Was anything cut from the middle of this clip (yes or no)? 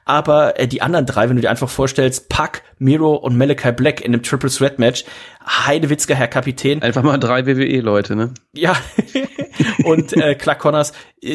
no